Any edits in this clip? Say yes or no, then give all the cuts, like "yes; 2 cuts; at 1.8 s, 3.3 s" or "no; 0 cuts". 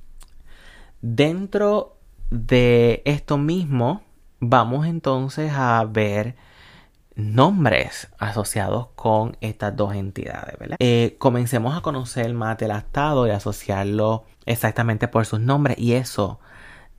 yes; 2 cuts; at 10.7 s, 14.3 s